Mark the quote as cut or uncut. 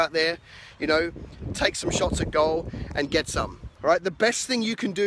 cut